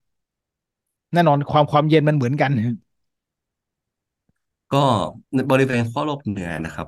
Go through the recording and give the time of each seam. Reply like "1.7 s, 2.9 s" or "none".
5.2 s